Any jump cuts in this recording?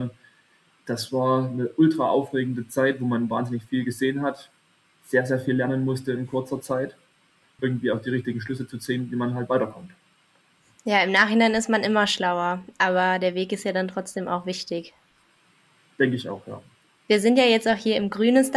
yes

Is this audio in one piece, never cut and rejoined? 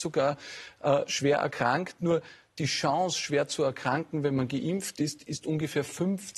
yes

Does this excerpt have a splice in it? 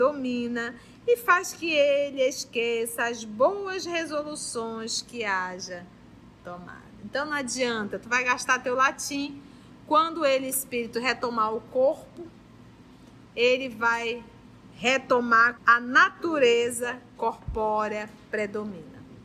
yes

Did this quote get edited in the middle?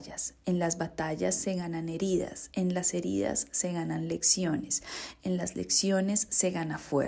no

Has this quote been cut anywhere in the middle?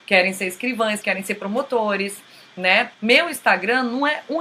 yes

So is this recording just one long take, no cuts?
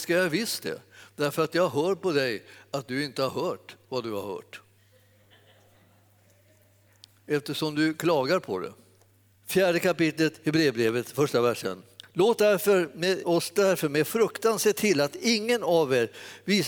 no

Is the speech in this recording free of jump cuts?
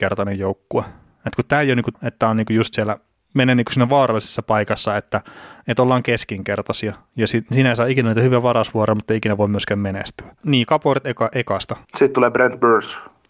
no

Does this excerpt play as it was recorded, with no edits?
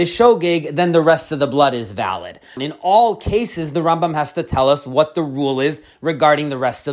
no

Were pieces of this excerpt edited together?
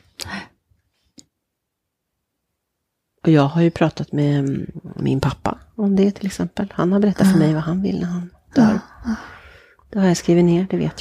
no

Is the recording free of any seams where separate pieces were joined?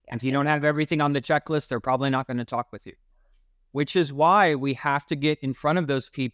yes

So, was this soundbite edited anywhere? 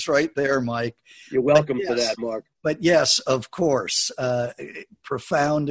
no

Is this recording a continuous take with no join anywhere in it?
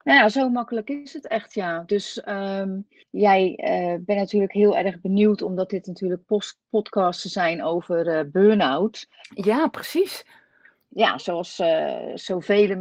yes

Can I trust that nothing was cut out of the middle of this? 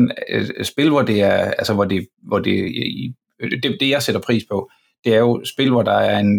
yes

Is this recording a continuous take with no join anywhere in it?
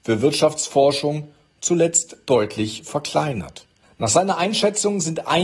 no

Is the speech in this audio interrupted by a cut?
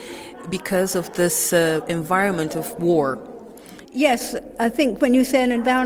yes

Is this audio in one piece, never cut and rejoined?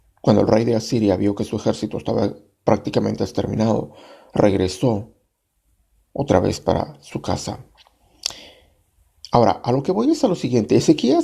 yes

